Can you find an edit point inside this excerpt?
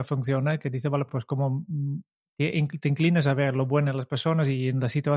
no; 0 cuts

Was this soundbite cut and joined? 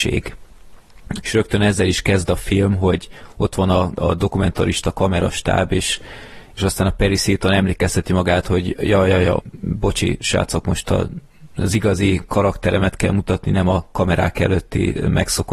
yes; 2 cuts; at 1.2 s, 9.4 s

